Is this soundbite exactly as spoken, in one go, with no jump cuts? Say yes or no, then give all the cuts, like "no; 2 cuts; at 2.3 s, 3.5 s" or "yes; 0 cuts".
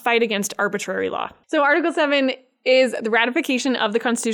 no; 1 cut; at 1.4 s